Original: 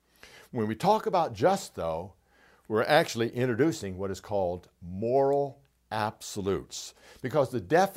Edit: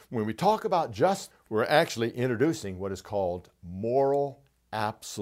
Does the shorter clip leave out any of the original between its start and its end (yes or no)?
yes